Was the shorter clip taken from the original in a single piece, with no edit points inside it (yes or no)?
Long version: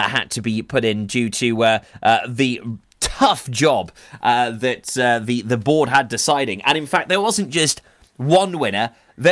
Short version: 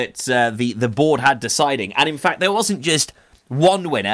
yes